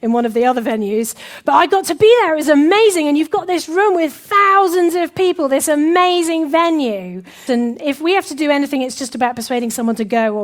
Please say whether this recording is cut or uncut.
cut